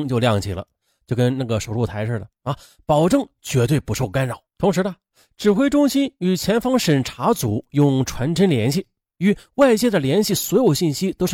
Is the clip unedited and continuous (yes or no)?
no